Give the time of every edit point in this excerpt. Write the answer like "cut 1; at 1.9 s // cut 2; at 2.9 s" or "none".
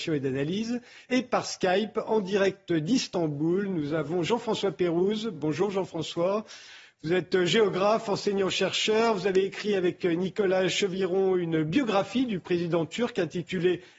none